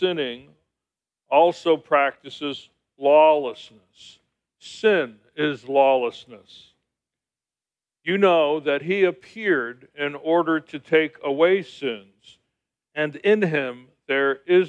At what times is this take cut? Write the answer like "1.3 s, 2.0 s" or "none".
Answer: none